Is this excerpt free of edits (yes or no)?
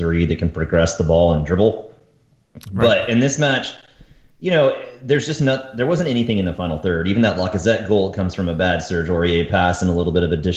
yes